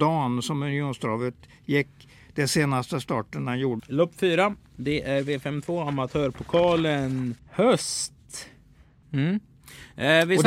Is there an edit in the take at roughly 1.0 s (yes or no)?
no